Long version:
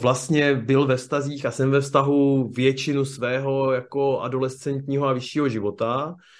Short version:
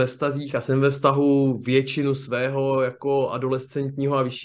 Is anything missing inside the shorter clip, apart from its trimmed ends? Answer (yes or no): no